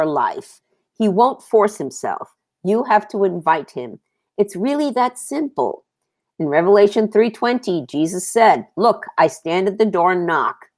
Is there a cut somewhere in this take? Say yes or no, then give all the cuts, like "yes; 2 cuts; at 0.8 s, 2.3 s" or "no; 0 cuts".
no; 0 cuts